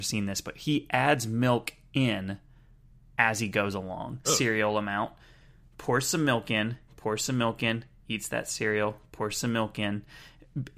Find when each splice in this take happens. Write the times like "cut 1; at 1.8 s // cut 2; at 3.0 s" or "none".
cut 1; at 4.2 s // cut 2; at 6.9 s